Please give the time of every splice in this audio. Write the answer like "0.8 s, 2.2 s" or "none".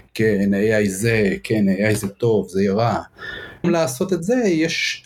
3.6 s